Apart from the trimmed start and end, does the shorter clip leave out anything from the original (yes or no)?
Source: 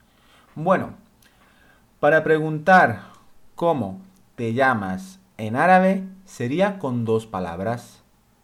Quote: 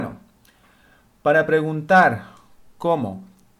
no